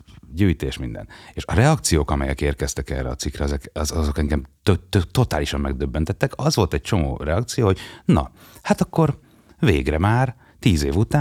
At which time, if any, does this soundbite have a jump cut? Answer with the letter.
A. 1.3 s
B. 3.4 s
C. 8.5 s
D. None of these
D